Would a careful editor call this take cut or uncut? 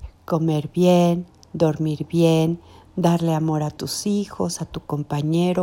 uncut